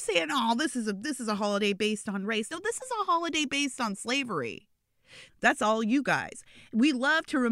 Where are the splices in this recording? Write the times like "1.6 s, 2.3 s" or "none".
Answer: 5.3 s